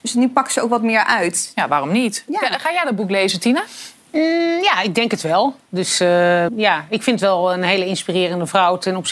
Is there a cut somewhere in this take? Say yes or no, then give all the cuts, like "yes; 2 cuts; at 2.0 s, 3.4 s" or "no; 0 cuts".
yes; 1 cut; at 6.5 s